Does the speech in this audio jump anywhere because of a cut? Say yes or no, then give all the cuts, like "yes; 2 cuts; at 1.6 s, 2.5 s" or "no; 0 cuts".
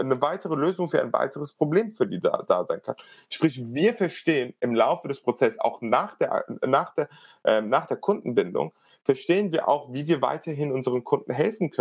no; 0 cuts